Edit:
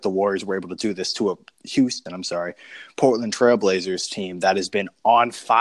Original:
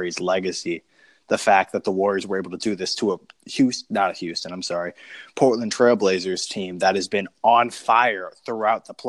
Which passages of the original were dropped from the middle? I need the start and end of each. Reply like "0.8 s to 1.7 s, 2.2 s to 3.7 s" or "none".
3.9 s to 4.4 s